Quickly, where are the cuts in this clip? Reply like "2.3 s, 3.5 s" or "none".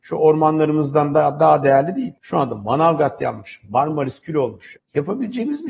2.2 s, 3.6 s, 4.7 s